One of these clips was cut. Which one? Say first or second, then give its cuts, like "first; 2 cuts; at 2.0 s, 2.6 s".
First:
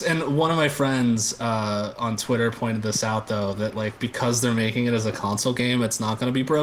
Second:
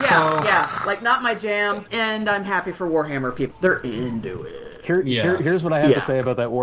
second; 2 cuts; at 1.9 s, 3.5 s